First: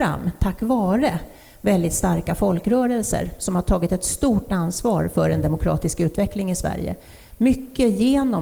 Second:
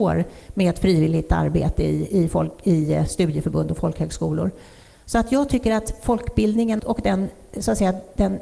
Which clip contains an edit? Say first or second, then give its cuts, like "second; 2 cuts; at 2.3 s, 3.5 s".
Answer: second; 1 cut; at 6.8 s